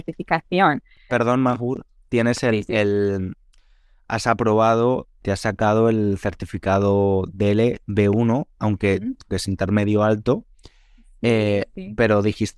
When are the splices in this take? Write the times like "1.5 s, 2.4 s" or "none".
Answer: 1.1 s, 9.3 s